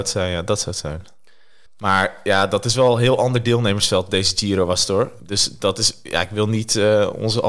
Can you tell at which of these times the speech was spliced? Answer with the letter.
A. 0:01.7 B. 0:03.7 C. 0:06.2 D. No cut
A